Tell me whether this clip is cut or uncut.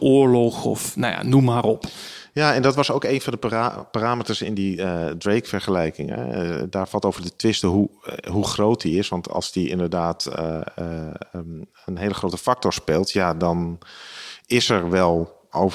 uncut